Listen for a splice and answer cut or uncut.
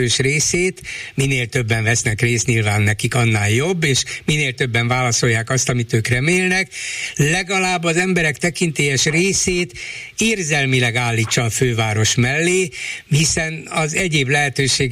uncut